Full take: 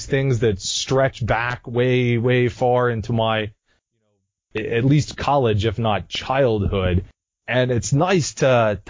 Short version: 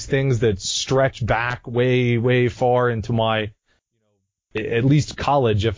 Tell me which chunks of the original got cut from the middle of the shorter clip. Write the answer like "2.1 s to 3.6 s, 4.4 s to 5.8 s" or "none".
none